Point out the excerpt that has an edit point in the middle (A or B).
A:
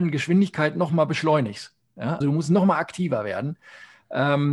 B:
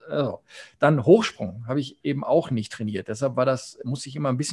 A